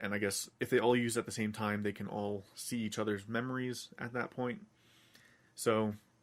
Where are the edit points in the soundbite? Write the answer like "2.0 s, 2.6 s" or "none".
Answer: none